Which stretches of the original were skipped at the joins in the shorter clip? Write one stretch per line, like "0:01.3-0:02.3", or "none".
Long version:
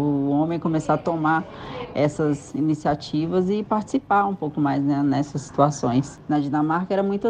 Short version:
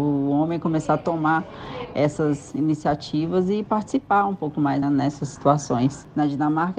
0:04.8-0:05.0